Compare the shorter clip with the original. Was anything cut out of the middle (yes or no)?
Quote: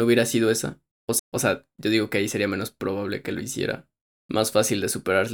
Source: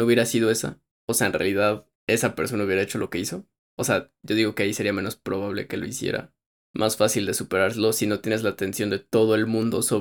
yes